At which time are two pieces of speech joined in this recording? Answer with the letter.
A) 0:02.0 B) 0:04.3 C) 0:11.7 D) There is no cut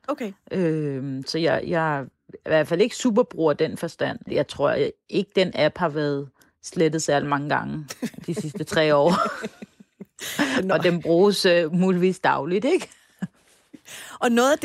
B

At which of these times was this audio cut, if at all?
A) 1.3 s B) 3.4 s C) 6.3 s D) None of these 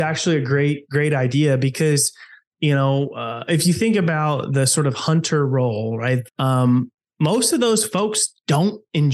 C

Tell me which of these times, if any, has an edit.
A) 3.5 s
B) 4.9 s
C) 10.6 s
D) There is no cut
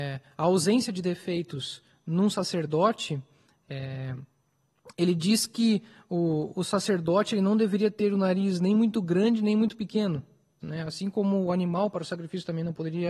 C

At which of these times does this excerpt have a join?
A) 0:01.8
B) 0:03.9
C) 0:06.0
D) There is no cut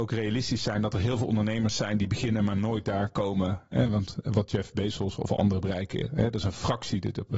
D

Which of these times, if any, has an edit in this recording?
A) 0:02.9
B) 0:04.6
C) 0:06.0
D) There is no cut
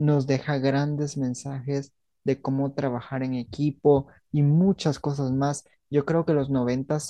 D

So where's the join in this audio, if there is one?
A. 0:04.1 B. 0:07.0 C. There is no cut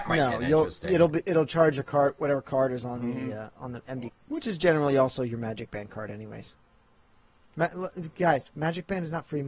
A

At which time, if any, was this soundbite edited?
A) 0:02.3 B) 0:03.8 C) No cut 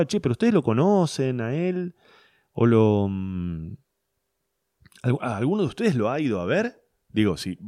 C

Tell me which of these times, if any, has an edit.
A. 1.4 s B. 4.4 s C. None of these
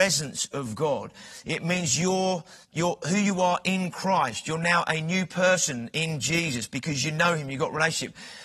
A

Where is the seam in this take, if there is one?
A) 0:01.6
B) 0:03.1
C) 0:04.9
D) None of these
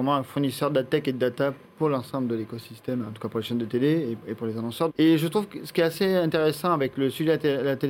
C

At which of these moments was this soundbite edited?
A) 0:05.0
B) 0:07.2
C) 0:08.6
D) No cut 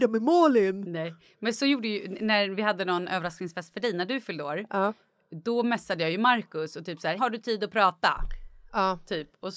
B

